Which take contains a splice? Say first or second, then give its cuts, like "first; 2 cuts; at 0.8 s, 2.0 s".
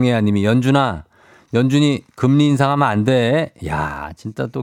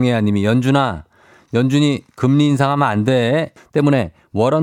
second; 1 cut; at 3.6 s